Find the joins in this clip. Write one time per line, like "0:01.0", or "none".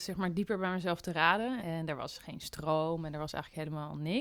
0:01.6